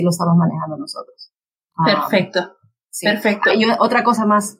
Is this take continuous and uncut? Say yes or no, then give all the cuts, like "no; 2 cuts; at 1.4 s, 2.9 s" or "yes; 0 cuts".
yes; 0 cuts